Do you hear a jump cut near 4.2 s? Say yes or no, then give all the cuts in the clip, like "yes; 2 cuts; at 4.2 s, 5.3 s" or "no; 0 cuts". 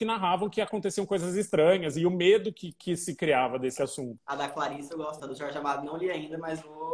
yes; 2 cuts; at 4.2 s, 5.2 s